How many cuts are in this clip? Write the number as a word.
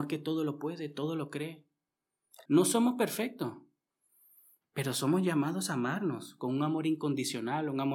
one